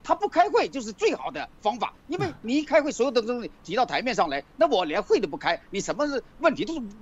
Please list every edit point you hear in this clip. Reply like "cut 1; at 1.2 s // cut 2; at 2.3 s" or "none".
none